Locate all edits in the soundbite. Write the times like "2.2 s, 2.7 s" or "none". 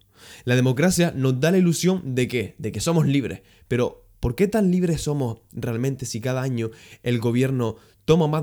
none